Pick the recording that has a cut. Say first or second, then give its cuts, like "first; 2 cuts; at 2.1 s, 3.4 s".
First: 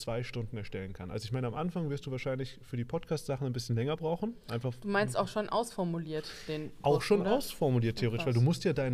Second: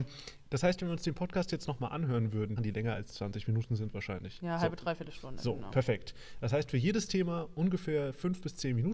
second; 1 cut; at 2.6 s